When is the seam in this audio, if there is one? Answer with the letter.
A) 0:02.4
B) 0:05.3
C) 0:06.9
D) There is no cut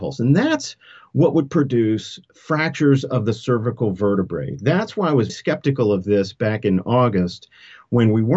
B